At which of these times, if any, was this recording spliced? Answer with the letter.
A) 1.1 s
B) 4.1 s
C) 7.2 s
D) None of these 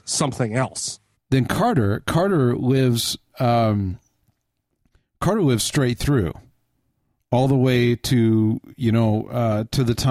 A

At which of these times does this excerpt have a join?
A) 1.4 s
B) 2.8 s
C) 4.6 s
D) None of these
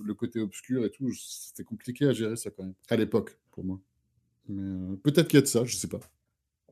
B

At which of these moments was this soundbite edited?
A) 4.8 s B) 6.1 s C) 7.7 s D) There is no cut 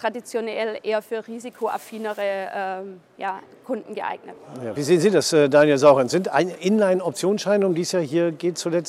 D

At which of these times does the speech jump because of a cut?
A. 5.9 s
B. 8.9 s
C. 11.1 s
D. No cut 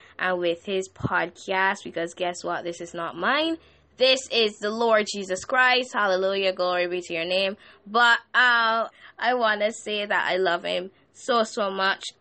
B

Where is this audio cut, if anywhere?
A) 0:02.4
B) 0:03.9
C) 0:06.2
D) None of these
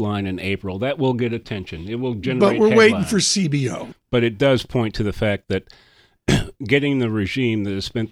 B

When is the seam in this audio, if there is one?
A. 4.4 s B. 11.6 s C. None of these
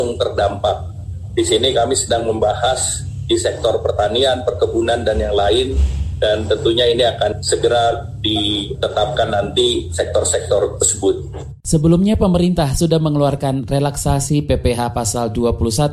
B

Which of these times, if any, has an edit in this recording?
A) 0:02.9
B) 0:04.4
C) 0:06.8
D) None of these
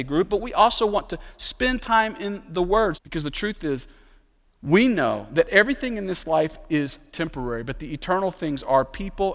A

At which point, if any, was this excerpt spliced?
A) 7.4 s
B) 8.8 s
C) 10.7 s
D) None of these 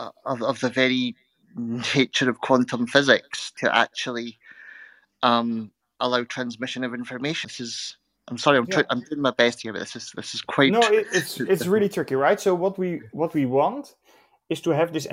A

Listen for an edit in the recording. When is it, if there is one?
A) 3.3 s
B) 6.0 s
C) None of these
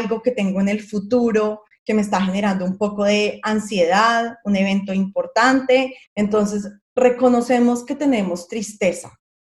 B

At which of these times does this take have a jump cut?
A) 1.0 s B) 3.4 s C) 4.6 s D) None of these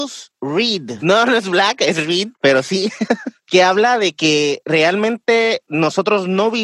A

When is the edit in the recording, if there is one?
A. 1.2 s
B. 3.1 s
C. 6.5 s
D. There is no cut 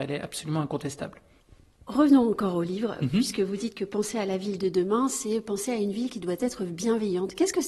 D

